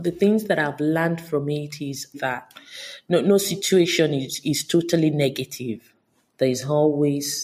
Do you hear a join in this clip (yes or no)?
yes